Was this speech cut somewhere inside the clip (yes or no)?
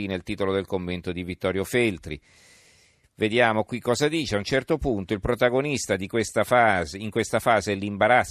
no